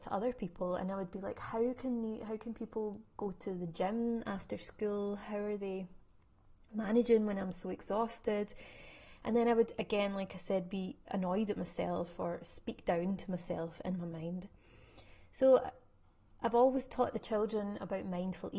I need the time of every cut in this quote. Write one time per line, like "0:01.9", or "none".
none